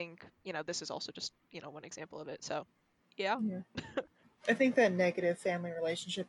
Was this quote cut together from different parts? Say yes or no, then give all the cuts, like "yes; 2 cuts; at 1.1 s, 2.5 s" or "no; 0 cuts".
no; 0 cuts